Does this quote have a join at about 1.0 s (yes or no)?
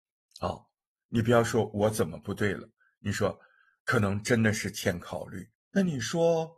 no